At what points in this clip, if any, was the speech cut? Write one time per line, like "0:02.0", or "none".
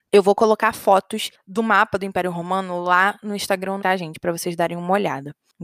0:03.8